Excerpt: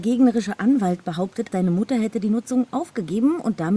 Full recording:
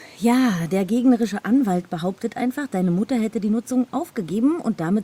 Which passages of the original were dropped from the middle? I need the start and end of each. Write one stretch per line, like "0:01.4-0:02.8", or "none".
0:02.3-0:02.7